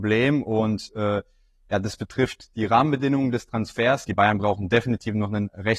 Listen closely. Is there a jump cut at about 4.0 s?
yes; 1 cut; at 4.0 s

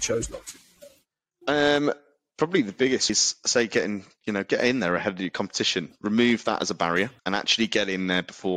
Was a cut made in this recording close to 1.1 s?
no; 2 cuts; at 3.1 s, 7.2 s

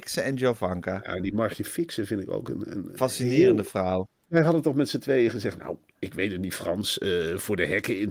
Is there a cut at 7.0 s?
no; 1 cut; at 4.3 s

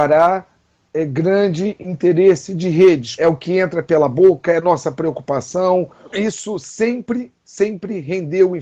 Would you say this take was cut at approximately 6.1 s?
yes; 2 cuts; at 3.2 s, 6.1 s

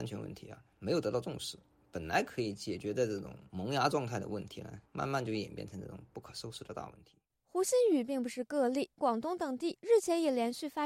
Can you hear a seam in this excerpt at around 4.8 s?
no; 1 cut; at 9.0 s

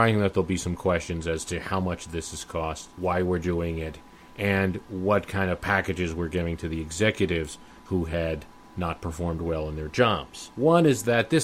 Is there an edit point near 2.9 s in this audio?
no; 1 cut; at 10.5 s

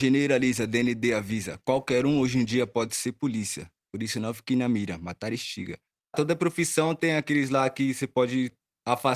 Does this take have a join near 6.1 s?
yes; 2 cuts; at 3.8 s, 6.1 s

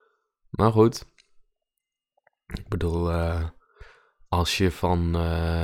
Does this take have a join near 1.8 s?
no; 0 cuts

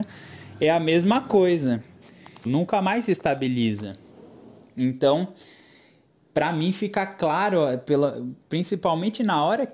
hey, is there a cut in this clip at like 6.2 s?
no; 1 cut; at 2.4 s

